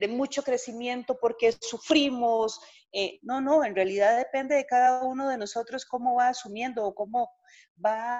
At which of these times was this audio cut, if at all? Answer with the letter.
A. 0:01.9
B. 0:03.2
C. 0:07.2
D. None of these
B